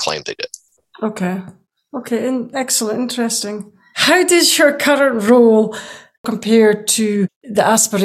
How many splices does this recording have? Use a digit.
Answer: 0